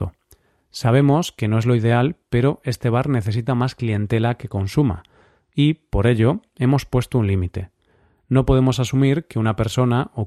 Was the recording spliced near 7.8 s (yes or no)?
no